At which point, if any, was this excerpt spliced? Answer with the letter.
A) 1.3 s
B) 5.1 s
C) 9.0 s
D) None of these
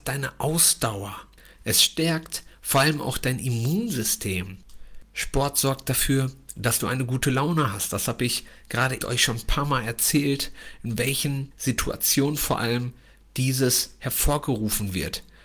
C